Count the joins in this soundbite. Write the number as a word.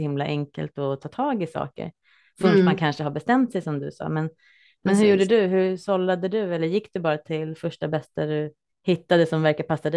zero